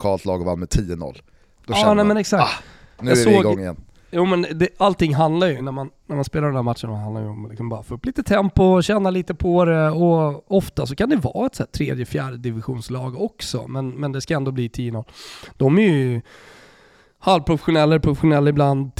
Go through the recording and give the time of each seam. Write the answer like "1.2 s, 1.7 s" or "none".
none